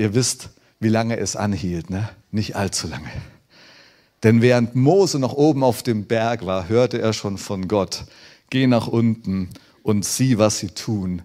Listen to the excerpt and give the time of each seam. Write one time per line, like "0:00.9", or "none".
0:02.2